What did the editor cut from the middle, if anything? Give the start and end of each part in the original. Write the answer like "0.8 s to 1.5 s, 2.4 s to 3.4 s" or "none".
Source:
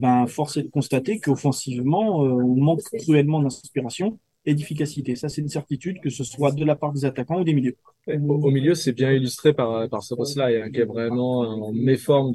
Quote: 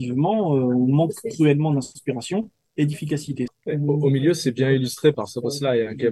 5.2 s to 7.9 s, 9.6 s to 9.9 s